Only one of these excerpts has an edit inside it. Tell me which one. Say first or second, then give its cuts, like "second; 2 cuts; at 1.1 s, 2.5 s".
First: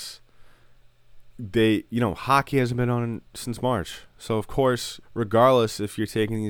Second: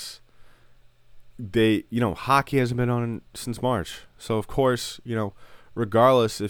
first; 1 cut; at 5.0 s